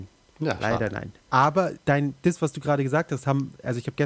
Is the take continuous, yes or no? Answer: yes